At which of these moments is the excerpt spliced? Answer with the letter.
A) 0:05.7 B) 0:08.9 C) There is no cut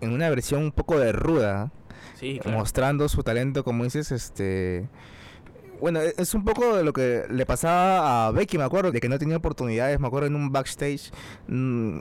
B